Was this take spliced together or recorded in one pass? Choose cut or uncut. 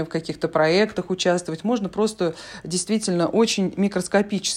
uncut